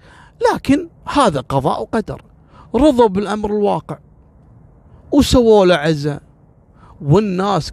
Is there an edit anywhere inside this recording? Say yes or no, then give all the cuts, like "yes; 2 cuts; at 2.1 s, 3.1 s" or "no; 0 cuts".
no; 0 cuts